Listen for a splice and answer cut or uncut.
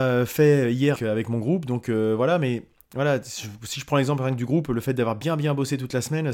cut